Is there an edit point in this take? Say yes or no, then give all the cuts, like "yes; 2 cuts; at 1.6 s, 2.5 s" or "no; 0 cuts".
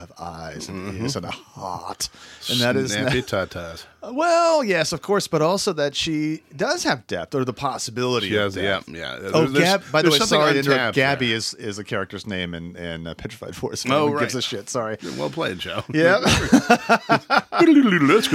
no; 0 cuts